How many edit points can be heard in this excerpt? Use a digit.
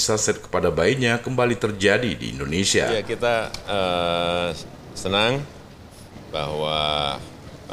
0